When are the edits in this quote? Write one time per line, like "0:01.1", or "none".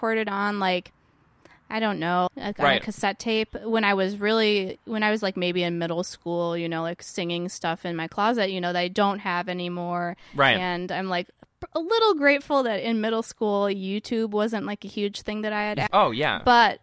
0:02.3
0:15.9